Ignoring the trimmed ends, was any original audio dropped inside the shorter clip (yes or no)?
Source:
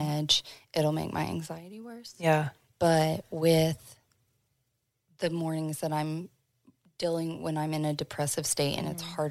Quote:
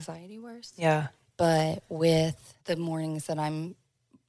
yes